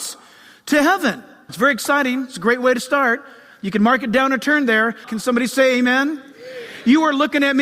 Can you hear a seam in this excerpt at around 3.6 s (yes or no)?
no